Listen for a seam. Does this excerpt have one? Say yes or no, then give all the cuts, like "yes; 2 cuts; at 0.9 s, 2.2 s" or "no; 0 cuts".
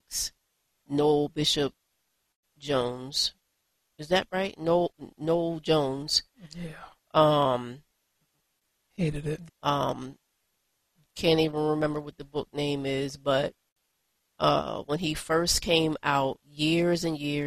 yes; 1 cut; at 9.5 s